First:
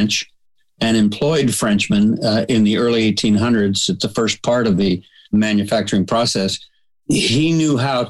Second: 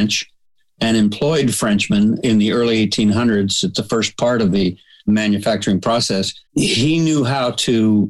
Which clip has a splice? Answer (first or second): second